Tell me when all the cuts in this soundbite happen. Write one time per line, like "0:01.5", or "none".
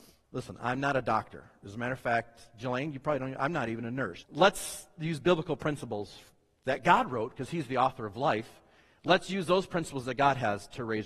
0:04.2